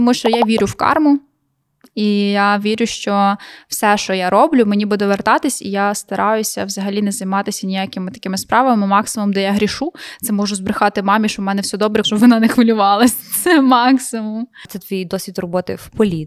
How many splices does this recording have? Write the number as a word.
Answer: one